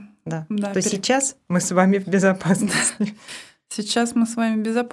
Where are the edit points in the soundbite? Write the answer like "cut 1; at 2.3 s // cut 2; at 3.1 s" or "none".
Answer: none